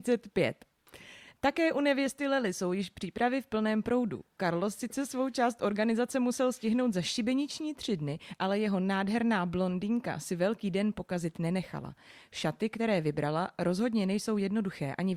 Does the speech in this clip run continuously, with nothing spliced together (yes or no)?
yes